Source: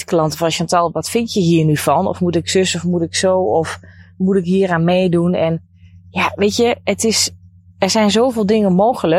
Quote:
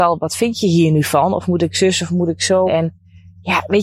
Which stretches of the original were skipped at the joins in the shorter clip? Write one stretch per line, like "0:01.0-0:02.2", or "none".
0:03.4-0:05.3